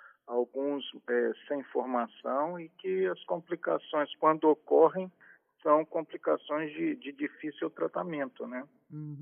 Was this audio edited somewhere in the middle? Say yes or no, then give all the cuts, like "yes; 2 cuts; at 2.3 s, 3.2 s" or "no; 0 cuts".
no; 0 cuts